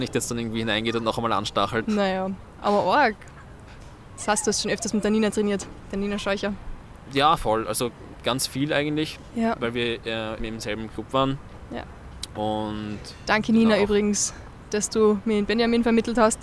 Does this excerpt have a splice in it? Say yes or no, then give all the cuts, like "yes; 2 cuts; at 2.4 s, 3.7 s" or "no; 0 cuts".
yes; 2 cuts; at 1.8 s, 10.4 s